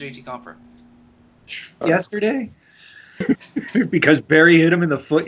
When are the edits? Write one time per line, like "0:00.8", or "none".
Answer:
0:01.8
0:03.2